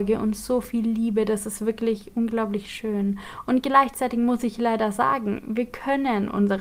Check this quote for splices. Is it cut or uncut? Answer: uncut